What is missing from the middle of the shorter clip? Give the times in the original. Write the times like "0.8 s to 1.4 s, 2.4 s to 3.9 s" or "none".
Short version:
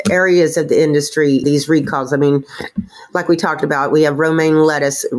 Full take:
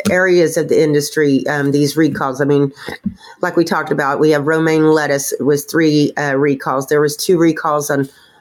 1.4 s to 1.7 s